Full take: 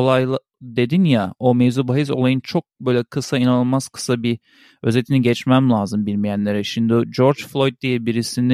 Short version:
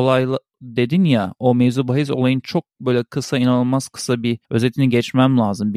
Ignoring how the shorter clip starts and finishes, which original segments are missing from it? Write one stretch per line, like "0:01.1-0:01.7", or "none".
0:04.4-0:04.8